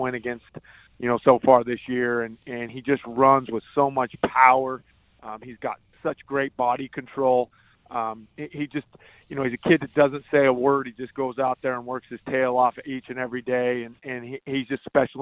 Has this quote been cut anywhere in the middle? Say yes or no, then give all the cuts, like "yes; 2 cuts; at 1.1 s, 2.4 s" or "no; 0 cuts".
no; 0 cuts